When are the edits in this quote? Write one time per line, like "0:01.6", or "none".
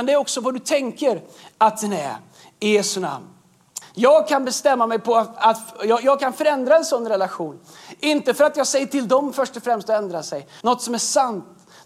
0:03.8
0:10.6